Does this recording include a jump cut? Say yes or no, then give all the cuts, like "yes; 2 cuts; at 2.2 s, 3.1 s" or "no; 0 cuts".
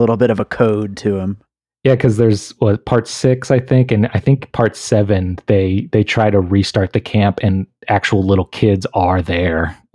no; 0 cuts